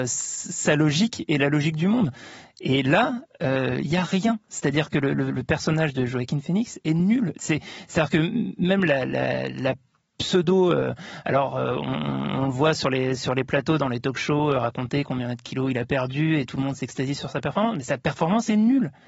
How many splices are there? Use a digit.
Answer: 0